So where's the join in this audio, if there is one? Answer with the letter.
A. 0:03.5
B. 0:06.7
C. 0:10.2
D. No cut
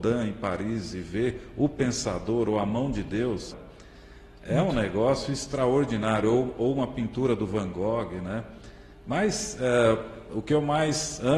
A